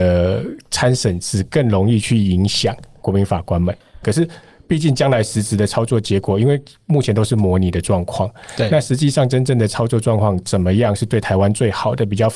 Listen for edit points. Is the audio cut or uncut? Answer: cut